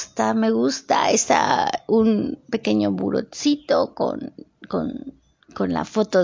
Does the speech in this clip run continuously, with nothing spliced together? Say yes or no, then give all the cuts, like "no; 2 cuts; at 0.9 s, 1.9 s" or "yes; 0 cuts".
yes; 0 cuts